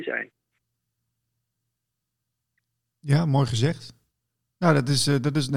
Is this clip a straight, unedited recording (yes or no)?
yes